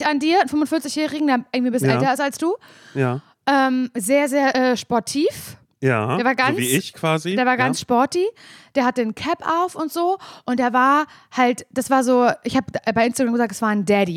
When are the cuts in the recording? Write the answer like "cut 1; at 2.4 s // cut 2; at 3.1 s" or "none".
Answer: none